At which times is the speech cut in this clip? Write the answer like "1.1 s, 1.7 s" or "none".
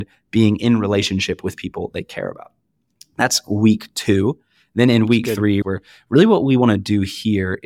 5.6 s

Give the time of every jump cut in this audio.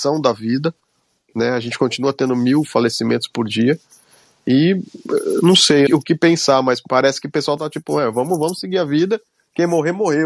5.9 s

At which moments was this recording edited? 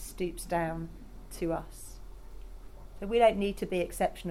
none

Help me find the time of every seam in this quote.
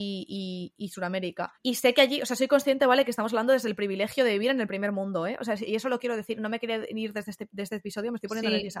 1.5 s

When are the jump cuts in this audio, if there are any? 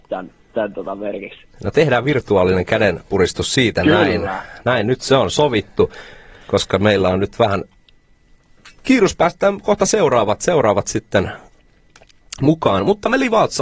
none

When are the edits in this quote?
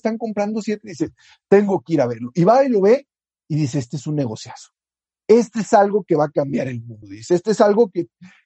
none

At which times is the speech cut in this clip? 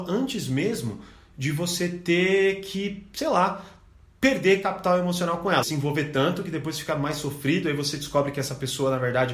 5.6 s

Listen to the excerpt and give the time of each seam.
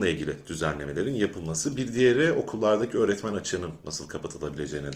none

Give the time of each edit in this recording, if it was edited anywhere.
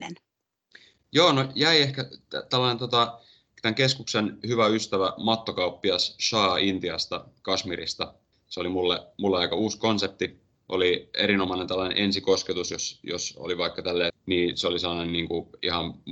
8.3 s, 10.5 s, 14.1 s

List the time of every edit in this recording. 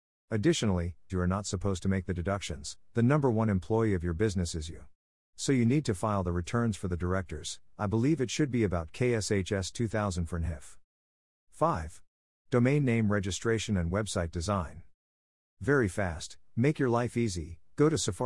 1.1 s

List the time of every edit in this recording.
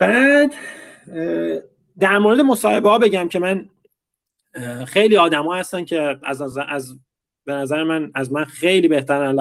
none

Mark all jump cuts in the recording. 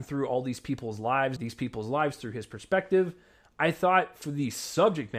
1.4 s

